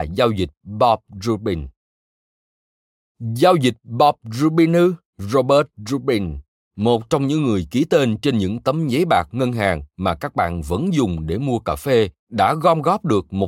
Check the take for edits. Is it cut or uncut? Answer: cut